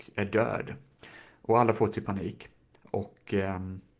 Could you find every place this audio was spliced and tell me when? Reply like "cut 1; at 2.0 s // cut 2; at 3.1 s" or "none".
cut 1; at 2.7 s